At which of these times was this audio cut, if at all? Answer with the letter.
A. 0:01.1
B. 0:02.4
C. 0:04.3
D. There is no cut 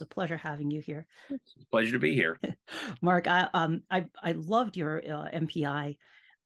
B